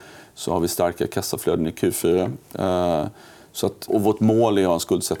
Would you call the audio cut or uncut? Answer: cut